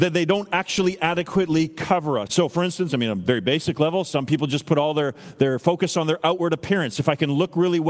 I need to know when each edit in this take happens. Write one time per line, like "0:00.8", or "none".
0:02.3